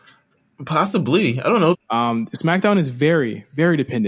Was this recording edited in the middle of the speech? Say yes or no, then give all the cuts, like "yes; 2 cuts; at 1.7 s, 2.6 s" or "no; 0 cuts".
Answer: yes; 1 cut; at 1.7 s